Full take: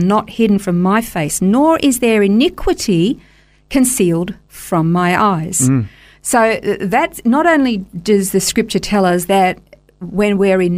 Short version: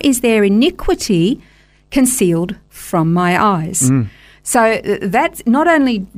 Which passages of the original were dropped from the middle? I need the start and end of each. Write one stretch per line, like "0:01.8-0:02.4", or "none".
none